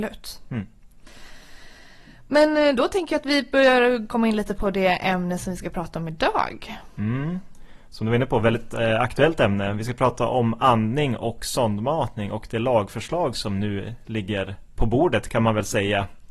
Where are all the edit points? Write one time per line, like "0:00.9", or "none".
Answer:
0:14.8

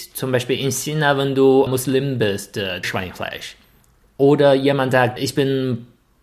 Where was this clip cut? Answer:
0:01.7
0:02.8
0:05.2

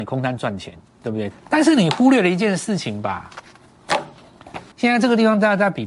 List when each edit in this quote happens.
0:01.3
0:04.7

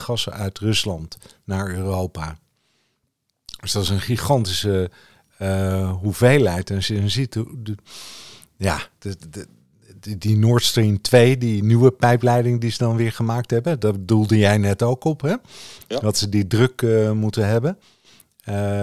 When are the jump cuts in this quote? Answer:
none

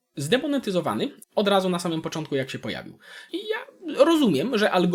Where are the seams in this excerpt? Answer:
0:01.2
0:03.3

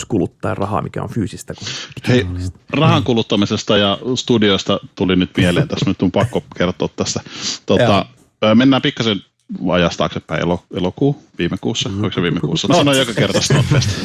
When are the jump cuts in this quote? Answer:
0:12.7

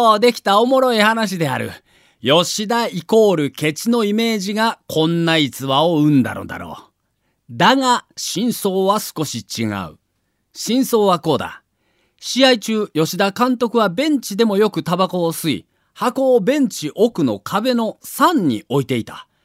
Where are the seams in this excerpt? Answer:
none

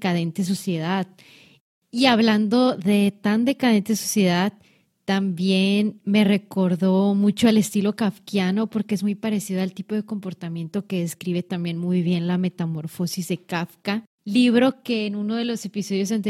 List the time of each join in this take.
none

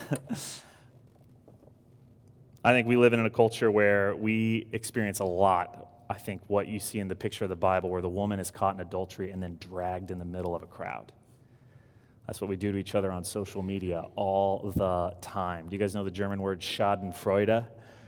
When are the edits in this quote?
none

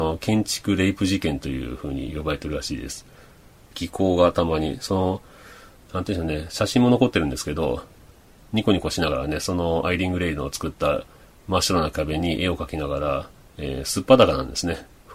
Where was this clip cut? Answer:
0:03.7

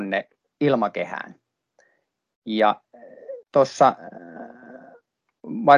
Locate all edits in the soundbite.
0:03.4

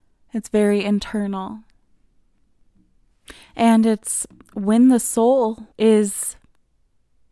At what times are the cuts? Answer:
0:05.7

